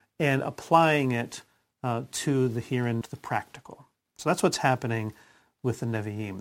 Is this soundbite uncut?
no; 1 cut; at 3.0 s

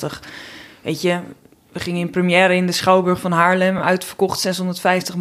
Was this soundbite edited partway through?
no; 0 cuts

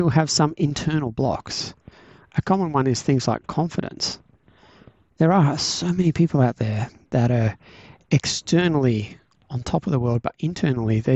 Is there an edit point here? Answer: no; 0 cuts

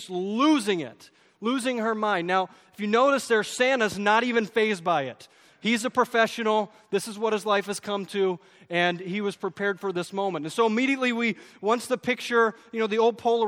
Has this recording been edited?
no; 0 cuts

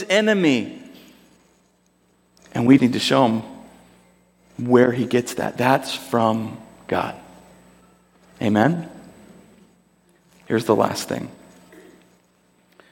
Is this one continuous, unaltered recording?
no; 1 cut; at 2.8 s

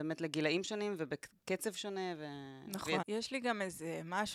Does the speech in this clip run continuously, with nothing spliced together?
no; 1 cut; at 3.0 s

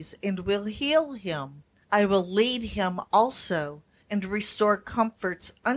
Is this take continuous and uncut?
yes; 0 cuts

